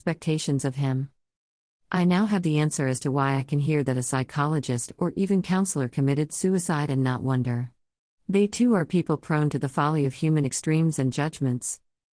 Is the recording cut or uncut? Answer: uncut